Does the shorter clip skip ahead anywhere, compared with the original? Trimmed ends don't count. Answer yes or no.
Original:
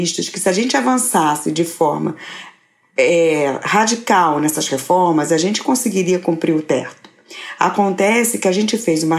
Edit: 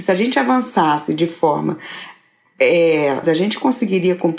yes